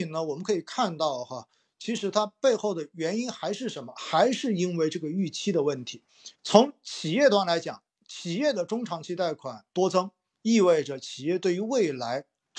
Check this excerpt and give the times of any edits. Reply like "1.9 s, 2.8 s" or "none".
6.3 s